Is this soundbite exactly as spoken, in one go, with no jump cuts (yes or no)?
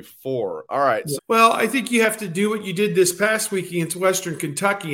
no